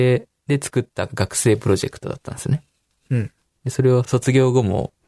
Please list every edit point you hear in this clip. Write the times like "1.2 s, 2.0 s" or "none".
4.0 s